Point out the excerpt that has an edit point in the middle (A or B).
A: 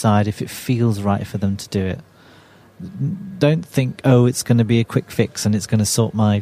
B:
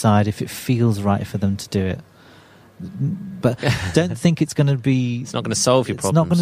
B